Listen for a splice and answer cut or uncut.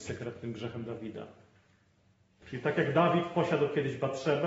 cut